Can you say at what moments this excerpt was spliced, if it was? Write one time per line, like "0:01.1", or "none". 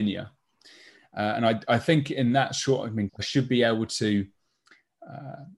0:03.1